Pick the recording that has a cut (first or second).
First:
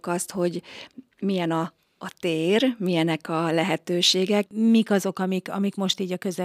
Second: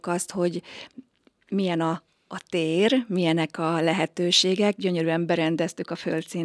first